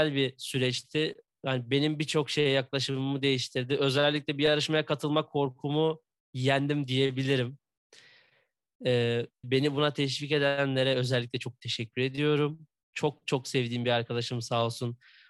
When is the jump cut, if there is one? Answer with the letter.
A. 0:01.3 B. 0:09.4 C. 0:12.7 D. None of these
B